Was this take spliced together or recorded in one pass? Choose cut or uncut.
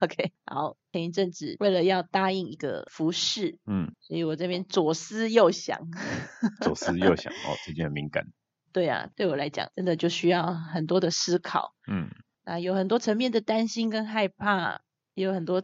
uncut